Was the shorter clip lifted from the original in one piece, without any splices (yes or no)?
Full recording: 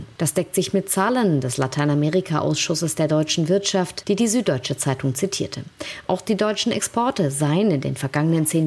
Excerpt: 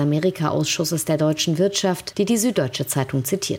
yes